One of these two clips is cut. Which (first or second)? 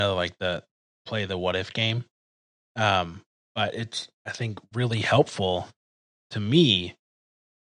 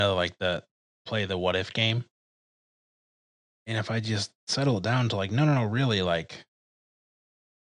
first